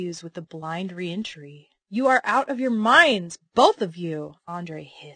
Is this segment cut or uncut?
uncut